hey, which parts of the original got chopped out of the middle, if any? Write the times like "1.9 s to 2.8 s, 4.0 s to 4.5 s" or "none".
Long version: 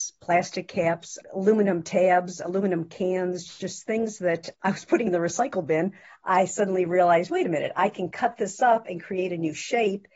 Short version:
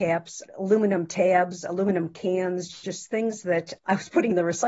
none